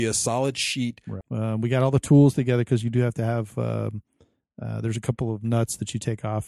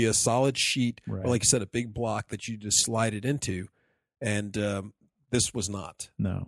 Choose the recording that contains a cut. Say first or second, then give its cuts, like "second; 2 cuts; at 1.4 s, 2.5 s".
first; 1 cut; at 1.2 s